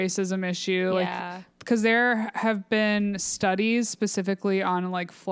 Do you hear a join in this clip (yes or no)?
no